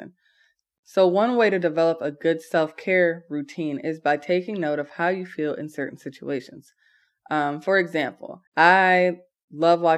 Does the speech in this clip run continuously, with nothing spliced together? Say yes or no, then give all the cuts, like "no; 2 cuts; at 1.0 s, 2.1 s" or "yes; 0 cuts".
no; 1 cut; at 8.5 s